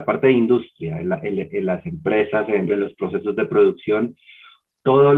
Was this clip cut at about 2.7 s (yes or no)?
yes